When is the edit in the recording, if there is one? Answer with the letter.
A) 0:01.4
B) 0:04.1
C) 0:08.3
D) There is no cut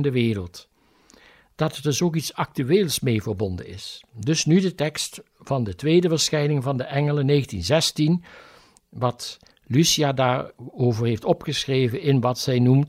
D